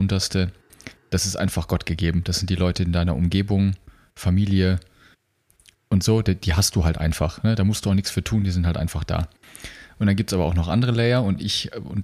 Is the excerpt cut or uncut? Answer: uncut